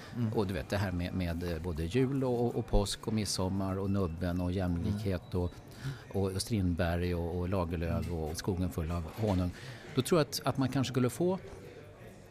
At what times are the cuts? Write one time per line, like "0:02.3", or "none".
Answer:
0:08.3